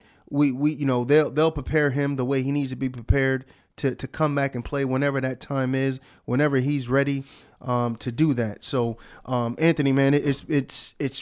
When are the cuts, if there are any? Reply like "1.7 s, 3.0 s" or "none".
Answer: none